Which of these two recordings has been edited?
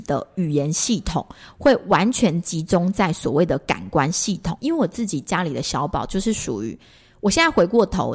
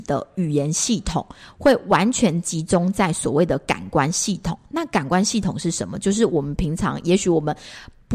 first; 1 cut; at 4.6 s

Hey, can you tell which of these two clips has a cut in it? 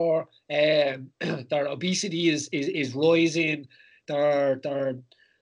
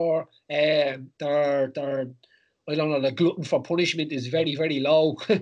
second; 1 cut; at 1.2 s

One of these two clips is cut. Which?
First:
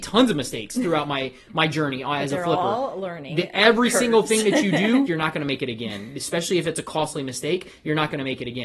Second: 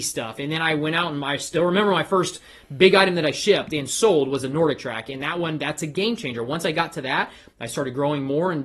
first; 1 cut; at 5.1 s

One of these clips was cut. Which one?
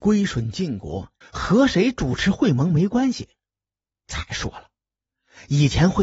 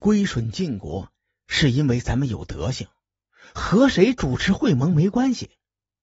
first; 1 cut; at 1.2 s

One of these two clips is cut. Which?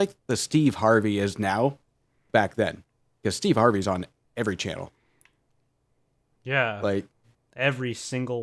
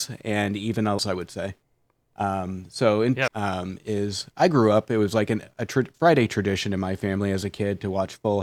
second; 2 cuts; at 1.0 s, 3.3 s

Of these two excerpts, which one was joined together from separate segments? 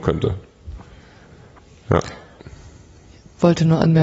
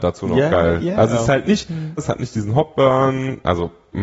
second; 1 cut; at 2.0 s

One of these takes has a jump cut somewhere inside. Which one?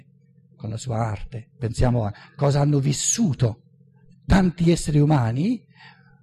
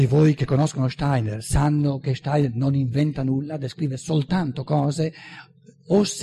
first; 1 cut; at 1.5 s

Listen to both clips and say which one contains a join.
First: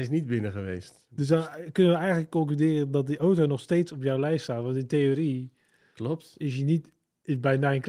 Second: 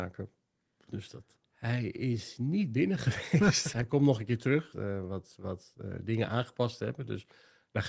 second; 3 cuts; at 1.4 s, 3.7 s, 4.7 s

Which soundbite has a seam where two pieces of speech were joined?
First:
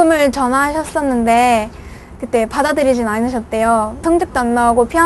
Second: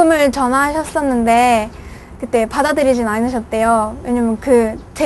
first; 1 cut; at 4.0 s

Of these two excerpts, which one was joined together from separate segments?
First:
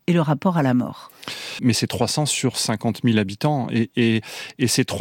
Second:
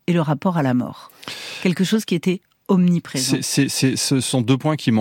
first; 1 cut; at 1.6 s

